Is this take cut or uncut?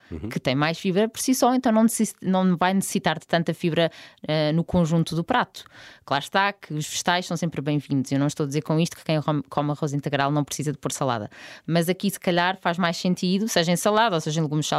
uncut